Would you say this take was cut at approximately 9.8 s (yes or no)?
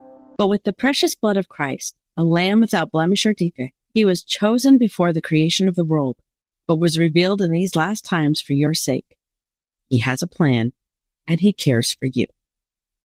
yes